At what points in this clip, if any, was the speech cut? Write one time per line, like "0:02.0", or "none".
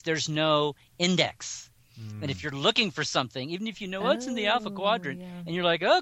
none